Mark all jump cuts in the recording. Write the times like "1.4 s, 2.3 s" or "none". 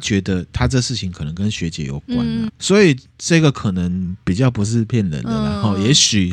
2.5 s